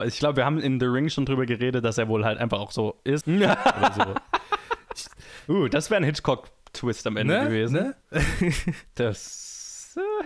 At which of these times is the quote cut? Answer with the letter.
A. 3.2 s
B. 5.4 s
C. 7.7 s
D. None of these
A